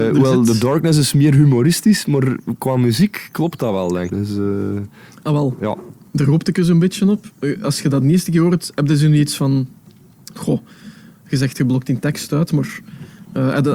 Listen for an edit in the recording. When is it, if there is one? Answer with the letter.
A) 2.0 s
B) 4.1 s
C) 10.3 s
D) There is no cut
B